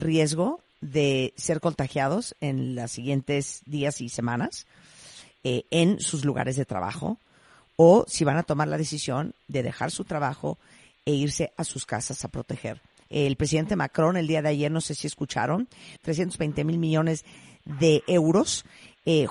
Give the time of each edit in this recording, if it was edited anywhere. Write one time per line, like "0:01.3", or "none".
0:13.0
0:16.0